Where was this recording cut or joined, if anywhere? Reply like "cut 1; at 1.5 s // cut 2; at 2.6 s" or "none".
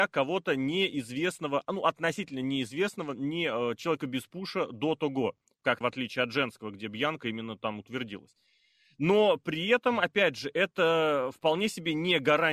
cut 1; at 5.8 s